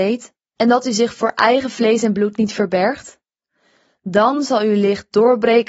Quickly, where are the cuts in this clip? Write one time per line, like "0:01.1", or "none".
none